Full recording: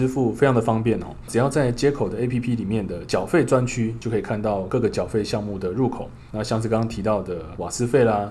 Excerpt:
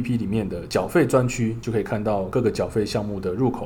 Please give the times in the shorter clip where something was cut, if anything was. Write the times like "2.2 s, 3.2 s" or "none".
none